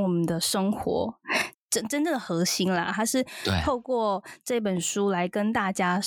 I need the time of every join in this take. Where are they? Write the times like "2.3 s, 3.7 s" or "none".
1.5 s